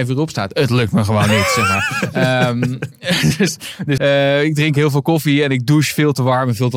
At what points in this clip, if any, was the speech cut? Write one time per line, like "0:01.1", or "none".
0:04.0